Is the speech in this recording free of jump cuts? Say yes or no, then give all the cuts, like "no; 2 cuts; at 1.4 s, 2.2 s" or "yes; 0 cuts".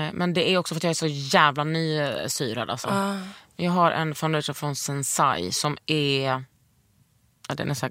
yes; 0 cuts